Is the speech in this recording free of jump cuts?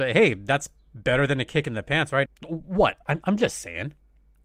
no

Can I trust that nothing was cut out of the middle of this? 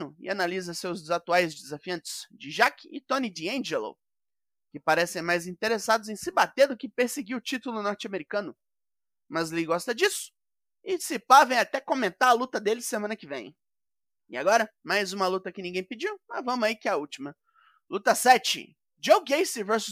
yes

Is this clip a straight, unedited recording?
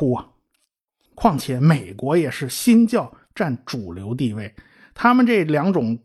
no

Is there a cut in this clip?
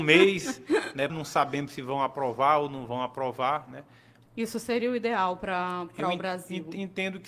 yes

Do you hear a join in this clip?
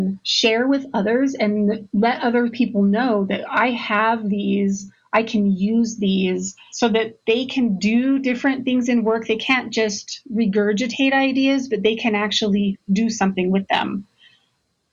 no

